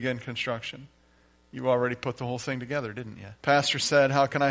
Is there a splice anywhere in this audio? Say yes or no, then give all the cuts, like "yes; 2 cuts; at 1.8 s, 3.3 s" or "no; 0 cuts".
yes; 1 cut; at 3.4 s